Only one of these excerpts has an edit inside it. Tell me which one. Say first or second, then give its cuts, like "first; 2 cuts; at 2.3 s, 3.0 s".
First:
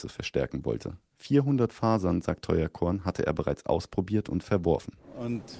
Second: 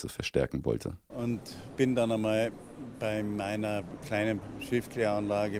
second; 1 cut; at 1.1 s